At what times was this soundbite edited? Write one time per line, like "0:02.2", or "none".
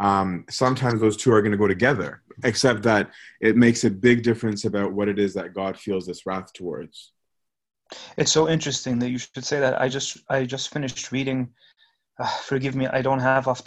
none